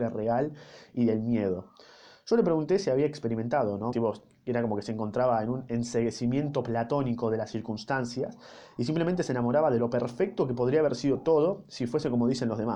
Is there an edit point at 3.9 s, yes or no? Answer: yes